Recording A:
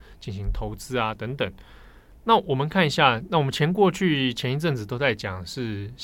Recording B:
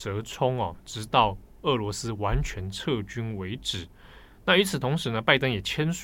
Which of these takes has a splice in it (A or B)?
A